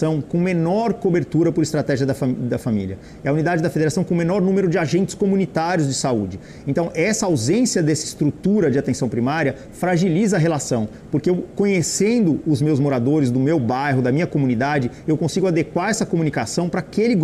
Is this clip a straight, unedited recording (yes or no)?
yes